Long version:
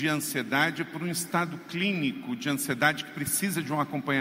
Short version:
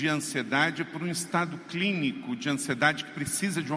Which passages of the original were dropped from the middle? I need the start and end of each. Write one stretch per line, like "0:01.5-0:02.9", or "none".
none